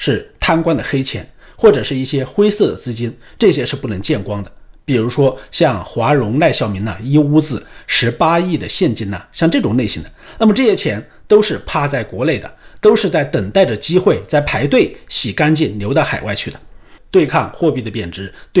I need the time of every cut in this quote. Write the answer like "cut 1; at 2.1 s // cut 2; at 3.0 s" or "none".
cut 1; at 17.0 s